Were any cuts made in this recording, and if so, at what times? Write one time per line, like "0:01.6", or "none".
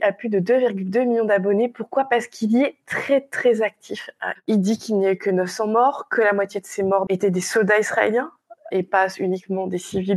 0:04.4
0:07.1